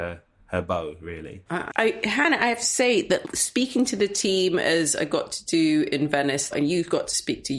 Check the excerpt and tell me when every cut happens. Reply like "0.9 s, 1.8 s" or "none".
1.7 s, 3.2 s, 6.5 s